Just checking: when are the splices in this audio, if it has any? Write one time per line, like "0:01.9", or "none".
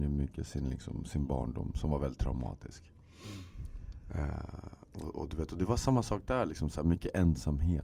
none